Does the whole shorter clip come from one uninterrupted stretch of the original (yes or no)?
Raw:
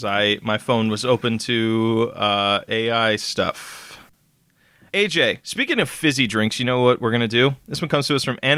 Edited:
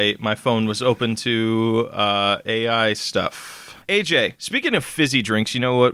no